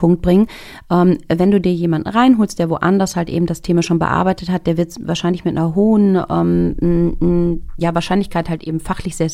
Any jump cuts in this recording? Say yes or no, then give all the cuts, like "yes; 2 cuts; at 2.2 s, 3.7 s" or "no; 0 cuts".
no; 0 cuts